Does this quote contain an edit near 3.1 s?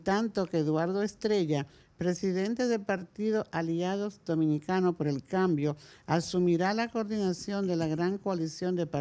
no; 0 cuts

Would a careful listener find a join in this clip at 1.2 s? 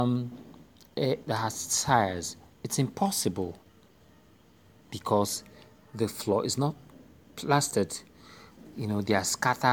yes; 1 cut; at 1.2 s

